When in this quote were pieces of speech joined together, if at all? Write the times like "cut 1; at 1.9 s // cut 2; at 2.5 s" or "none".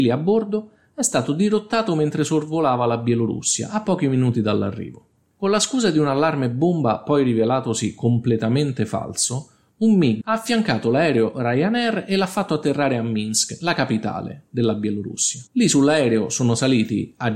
cut 1; at 10.2 s // cut 2; at 15.5 s